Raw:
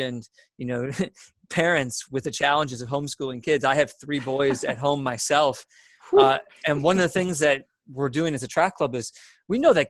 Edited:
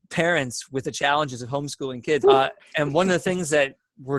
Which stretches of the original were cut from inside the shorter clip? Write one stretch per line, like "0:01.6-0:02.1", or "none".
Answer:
0:03.6-0:06.1